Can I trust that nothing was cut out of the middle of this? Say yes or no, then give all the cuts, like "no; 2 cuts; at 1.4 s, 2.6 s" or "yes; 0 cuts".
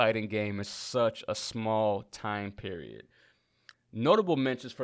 no; 1 cut; at 3.7 s